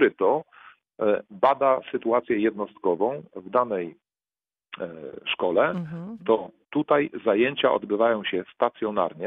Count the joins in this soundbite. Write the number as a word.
one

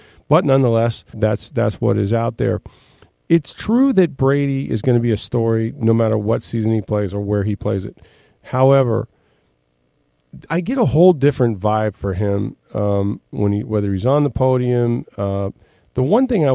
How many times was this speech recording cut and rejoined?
three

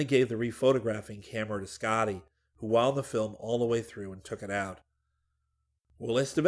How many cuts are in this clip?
zero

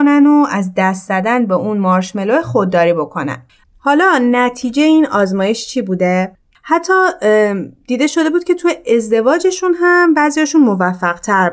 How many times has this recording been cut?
two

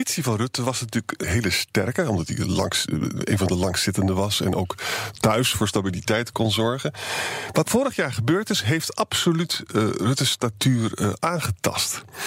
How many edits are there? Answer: two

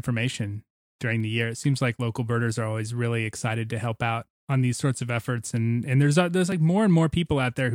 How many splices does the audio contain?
zero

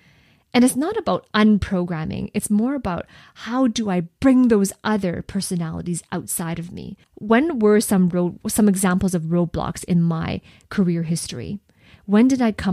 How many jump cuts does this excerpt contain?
one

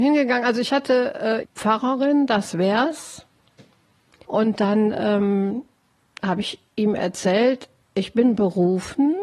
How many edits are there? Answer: two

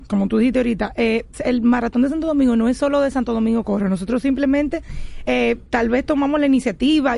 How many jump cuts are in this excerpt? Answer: one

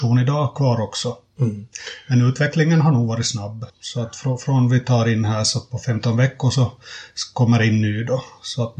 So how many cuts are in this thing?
one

